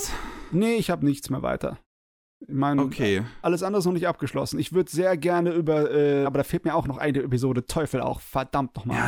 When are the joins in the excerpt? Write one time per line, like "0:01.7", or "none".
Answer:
0:06.3